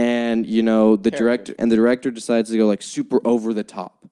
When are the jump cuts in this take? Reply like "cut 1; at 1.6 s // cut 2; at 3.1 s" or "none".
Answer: cut 1; at 1.5 s